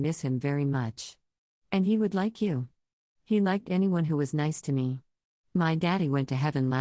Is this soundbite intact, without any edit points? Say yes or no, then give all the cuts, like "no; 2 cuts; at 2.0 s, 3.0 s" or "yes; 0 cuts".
no; 1 cut; at 5.4 s